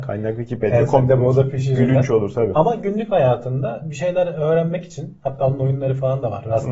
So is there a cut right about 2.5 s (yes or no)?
no